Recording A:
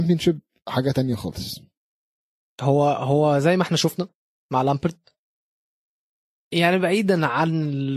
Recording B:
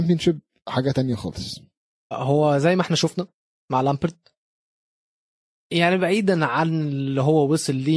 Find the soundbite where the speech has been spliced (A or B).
B